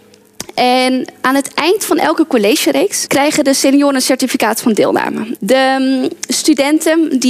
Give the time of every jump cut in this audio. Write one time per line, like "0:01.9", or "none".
0:03.1
0:05.4